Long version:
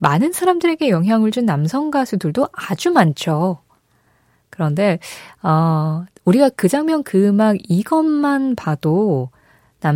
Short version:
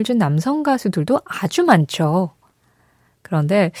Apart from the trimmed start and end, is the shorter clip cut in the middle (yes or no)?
no